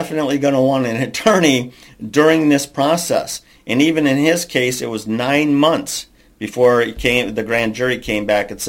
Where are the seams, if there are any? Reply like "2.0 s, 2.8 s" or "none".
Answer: none

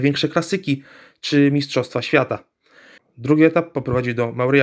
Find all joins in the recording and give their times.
3.0 s

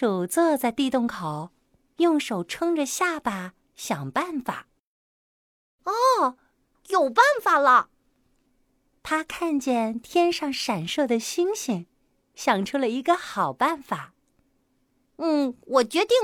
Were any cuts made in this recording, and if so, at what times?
none

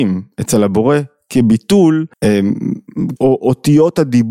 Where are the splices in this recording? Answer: 2.1 s, 3.2 s

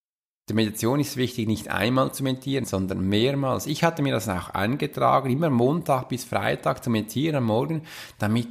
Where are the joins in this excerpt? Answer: 2.6 s

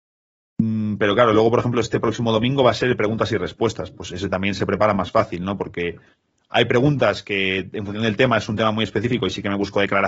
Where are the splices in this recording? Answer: none

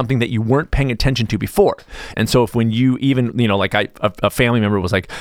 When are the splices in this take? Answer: 2.1 s

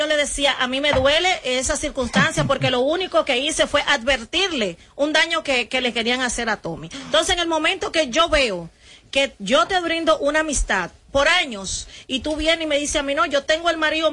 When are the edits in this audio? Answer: none

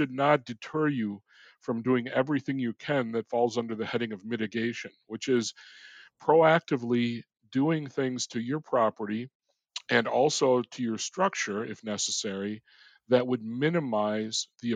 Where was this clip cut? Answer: none

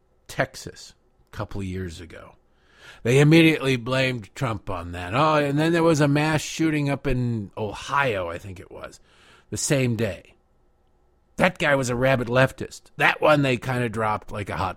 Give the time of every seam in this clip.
none

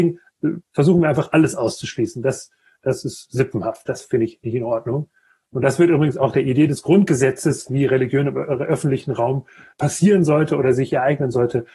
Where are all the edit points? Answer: 9.7 s

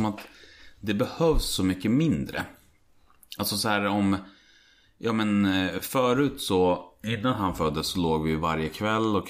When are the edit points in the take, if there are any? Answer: none

